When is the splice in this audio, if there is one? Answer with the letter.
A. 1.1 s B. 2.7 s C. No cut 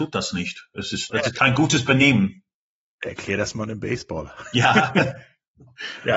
A